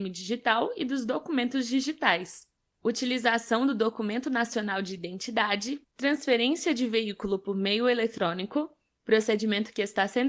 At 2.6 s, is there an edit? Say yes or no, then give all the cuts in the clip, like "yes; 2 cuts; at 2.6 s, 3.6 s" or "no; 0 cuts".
no; 1 cut; at 5.8 s